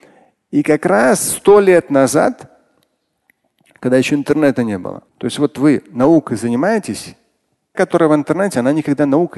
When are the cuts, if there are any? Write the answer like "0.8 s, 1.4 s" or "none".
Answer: 5.1 s, 7.7 s